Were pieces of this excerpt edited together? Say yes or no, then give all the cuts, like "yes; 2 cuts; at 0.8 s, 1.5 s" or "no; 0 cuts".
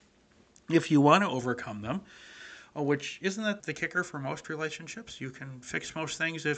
yes; 1 cut; at 3.6 s